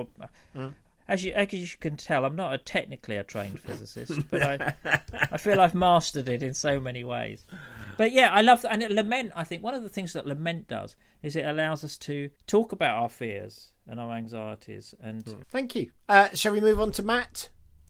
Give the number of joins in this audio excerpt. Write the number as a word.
two